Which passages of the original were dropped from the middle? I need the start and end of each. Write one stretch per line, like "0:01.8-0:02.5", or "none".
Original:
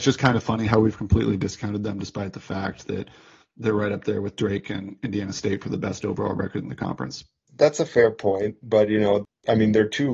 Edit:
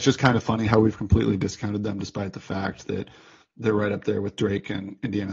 none